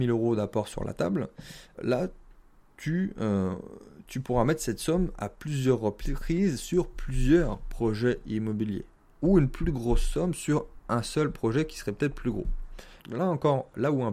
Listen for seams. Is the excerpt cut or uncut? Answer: cut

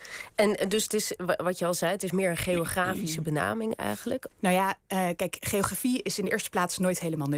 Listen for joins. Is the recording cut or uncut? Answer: cut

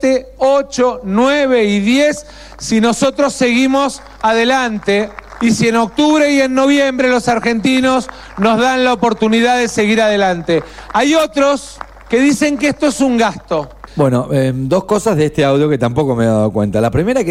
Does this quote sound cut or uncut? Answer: cut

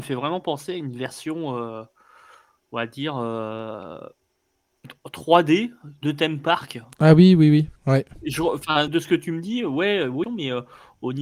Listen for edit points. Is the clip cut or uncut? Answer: cut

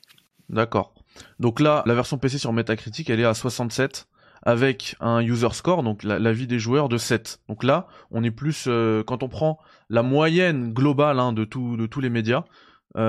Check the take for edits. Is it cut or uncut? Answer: cut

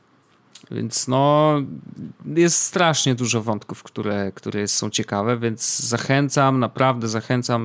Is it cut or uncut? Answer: uncut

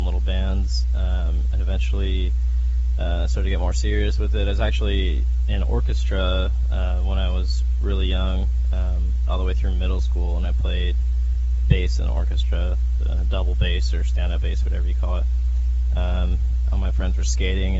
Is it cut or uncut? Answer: cut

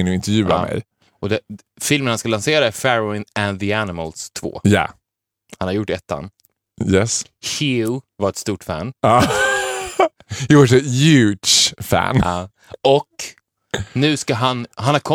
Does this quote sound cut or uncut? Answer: uncut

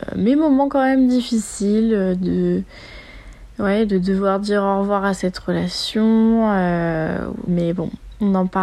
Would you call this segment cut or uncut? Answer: cut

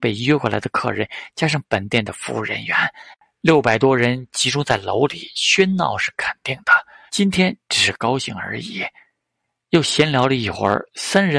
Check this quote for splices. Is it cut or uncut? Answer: cut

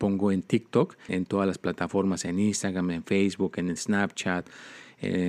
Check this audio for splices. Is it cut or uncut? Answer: cut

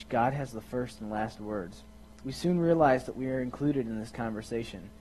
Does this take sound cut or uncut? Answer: uncut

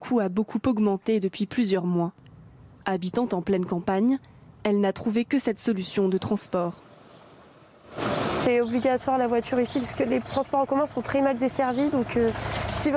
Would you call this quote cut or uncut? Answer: uncut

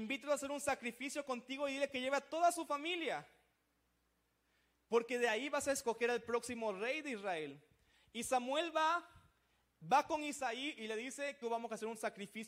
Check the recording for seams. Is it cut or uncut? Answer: cut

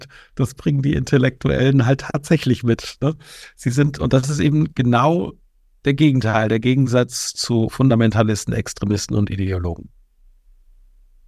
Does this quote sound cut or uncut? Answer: uncut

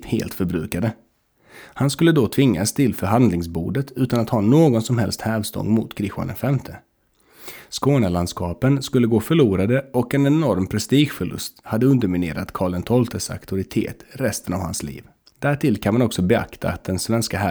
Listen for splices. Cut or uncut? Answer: uncut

